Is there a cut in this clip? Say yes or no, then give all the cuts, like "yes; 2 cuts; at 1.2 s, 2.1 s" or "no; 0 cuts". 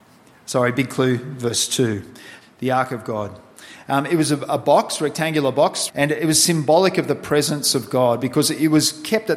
yes; 2 cuts; at 2.4 s, 5.9 s